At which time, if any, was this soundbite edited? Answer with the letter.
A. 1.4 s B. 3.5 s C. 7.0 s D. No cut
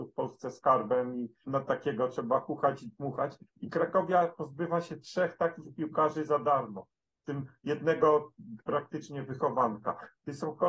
A